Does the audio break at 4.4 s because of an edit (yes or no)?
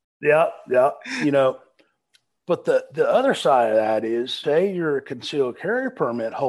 yes